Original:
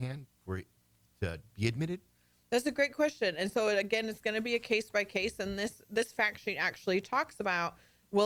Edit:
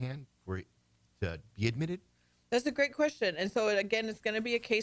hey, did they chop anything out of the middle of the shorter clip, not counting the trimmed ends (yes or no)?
no